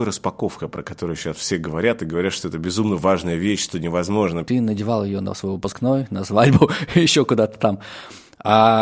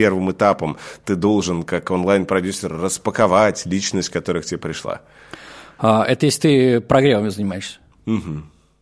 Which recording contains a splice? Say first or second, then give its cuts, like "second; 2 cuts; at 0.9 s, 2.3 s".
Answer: first; 1 cut; at 4.4 s